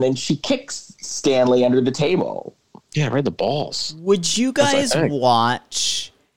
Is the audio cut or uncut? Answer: uncut